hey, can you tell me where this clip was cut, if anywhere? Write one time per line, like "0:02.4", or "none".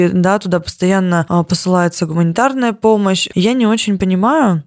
0:03.3